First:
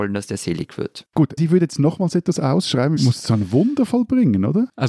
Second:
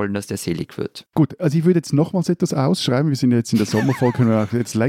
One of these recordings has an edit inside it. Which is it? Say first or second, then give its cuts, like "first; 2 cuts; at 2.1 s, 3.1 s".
first; 2 cuts; at 1.4 s, 3.0 s